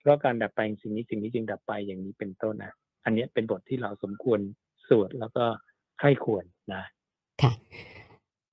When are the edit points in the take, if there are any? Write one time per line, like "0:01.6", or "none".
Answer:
0:02.5